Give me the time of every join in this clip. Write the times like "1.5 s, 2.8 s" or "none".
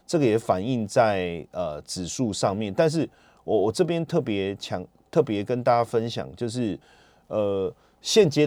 none